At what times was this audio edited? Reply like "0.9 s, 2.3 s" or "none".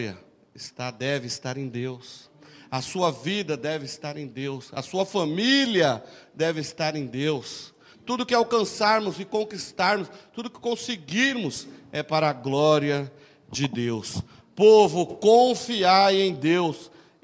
7.9 s